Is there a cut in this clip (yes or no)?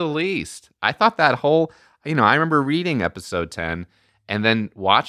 no